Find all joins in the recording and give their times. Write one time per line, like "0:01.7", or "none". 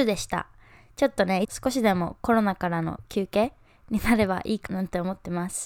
0:01.4
0:04.7